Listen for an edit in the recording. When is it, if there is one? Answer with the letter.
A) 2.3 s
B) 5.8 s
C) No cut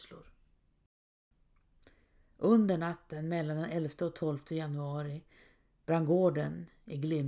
C